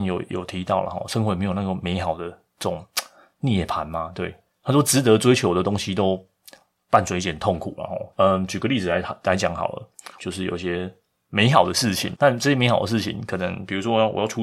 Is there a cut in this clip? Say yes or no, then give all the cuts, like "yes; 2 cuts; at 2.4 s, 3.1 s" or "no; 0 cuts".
yes; 3 cuts; at 8.1 s, 10.2 s, 12.1 s